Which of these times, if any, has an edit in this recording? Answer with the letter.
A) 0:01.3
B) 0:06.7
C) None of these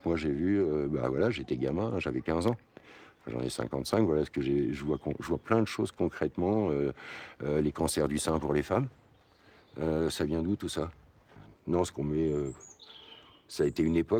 C